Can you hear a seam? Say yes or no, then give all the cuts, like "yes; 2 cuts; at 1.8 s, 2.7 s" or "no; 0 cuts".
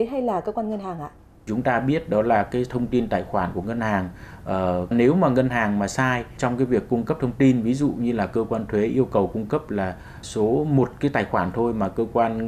yes; 2 cuts; at 4.9 s, 10.2 s